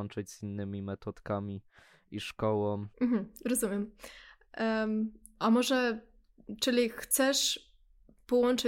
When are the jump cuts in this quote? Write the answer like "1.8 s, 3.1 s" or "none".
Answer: 2.9 s